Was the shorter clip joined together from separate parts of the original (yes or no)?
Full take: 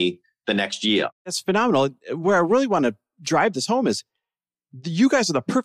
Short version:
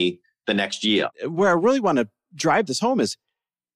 yes